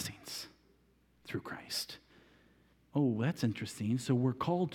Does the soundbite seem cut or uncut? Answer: cut